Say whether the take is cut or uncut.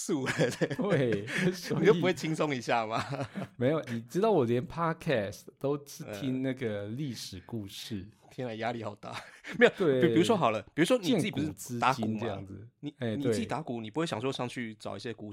cut